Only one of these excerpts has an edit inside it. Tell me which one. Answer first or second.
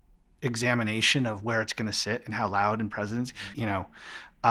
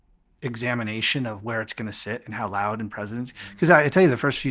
first